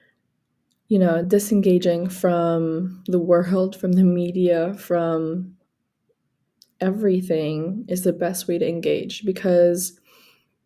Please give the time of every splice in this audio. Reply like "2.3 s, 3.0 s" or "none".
none

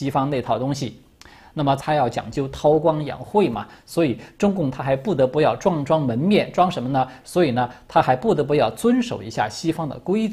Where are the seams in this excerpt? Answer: 1.8 s, 7.2 s

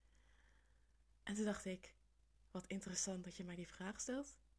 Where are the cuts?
none

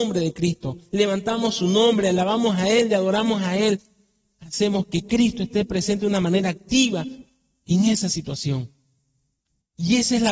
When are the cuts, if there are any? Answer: none

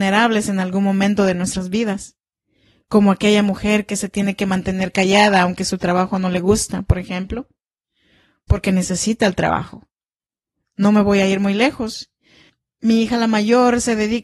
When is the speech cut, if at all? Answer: none

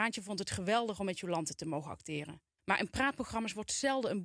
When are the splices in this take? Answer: 2.6 s

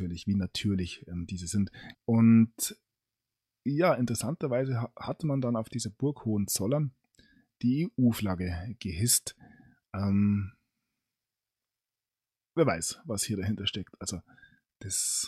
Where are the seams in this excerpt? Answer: 1.9 s

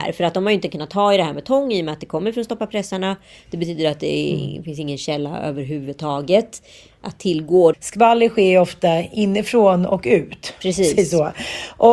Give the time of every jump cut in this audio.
7.7 s

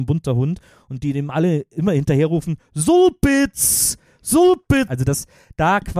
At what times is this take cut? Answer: 4.9 s

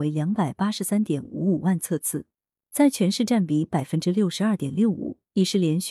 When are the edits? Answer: none

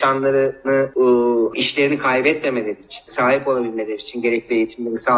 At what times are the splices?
1.5 s, 3.1 s

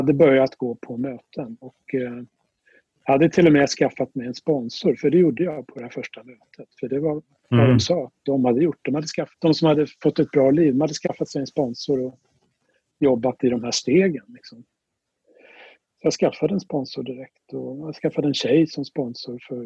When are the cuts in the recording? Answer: 9.3 s

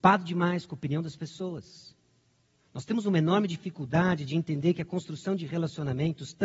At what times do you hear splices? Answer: 2.6 s

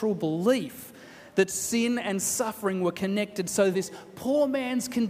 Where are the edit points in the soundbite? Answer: 3.7 s

